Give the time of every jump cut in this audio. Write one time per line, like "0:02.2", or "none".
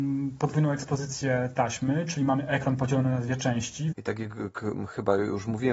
0:03.9